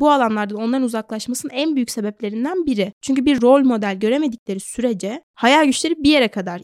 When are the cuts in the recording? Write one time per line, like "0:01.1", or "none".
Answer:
none